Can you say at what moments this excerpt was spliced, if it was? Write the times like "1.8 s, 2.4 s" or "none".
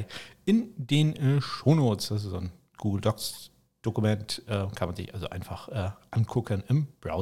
none